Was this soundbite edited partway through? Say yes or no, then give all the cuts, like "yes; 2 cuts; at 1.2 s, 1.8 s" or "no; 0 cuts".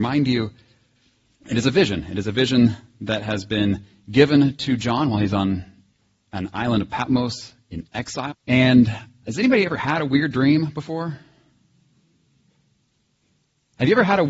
yes; 1 cut; at 8.3 s